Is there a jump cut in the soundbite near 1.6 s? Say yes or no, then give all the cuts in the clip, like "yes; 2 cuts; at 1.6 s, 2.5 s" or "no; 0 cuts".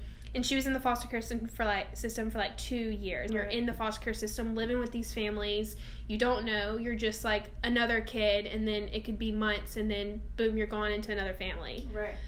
no; 1 cut; at 3.3 s